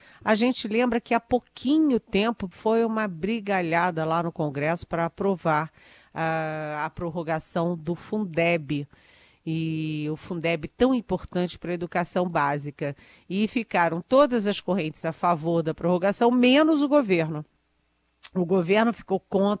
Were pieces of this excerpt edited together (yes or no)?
yes